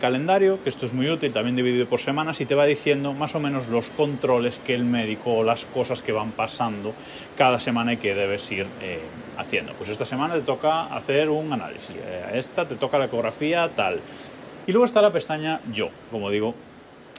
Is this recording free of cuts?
no; 3 cuts; at 11.9 s, 14.7 s, 16.1 s

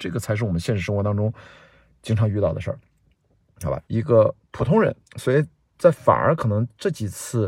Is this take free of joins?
no; 2 cuts; at 3.8 s, 5.0 s

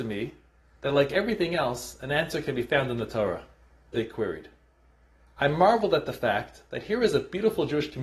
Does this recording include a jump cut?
yes; 1 cut; at 3.9 s

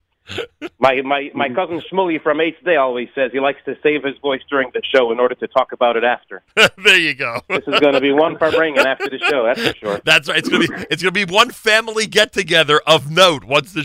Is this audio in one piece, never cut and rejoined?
yes; 0 cuts

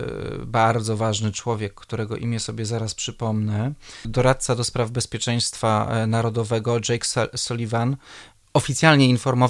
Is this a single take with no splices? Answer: no; 1 cut; at 4.0 s

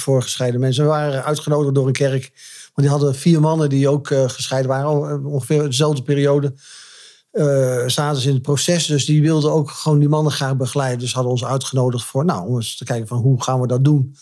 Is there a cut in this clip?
no; 0 cuts

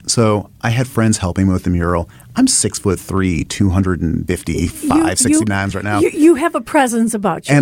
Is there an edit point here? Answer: no; 0 cuts

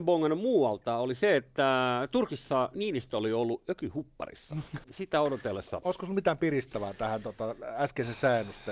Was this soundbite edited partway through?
yes; 1 cut; at 4.8 s

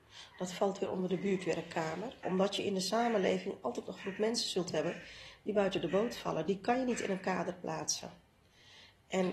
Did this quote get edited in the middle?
yes; 1 cut; at 2.2 s

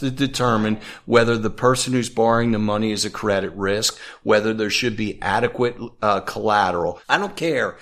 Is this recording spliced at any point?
no; 0 cuts

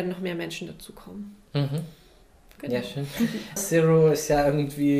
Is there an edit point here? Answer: yes; 1 cut; at 3.6 s

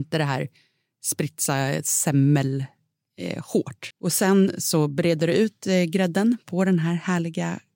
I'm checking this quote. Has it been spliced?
yes; 1 cut; at 3.9 s

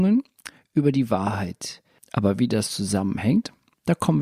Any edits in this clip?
yes; 1 cut; at 2.0 s

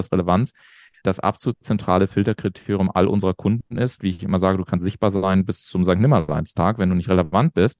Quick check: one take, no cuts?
no; 2 cuts; at 1.0 s, 4.0 s

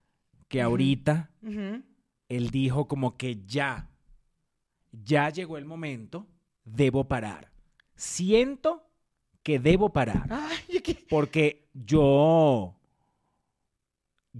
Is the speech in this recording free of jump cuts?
yes; 0 cuts

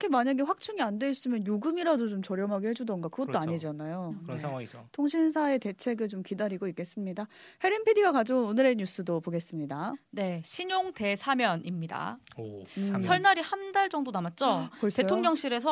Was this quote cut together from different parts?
no; 0 cuts

